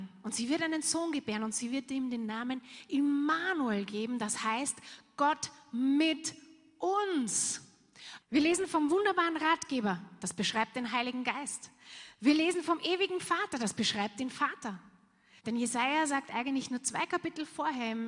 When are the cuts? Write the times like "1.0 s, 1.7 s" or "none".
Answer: 8.2 s, 15.4 s

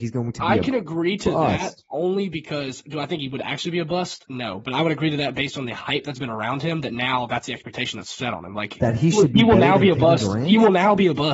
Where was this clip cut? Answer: none

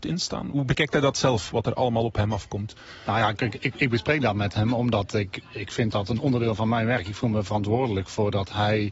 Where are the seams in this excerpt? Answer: 5.4 s

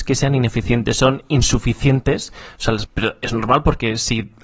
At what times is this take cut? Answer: 2.8 s

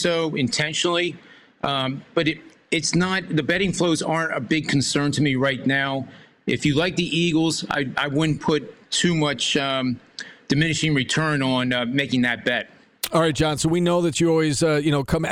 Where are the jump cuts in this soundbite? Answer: none

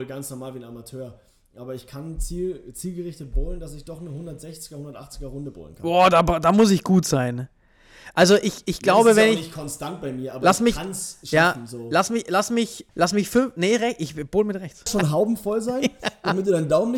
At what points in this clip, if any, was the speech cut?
12.9 s, 14.9 s

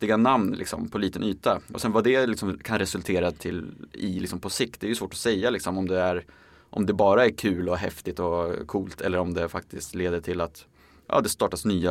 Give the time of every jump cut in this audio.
none

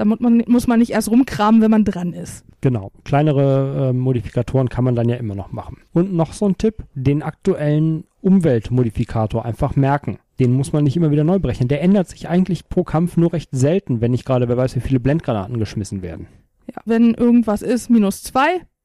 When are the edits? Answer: 16.9 s

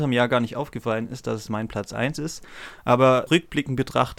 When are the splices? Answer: 3.3 s

